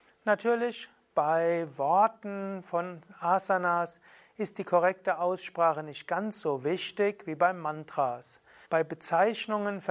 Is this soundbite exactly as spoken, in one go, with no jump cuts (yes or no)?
no